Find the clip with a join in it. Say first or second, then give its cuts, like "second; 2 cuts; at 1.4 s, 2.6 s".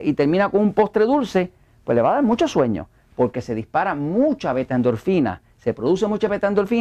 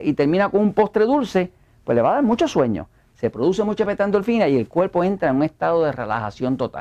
second; 1 cut; at 3.1 s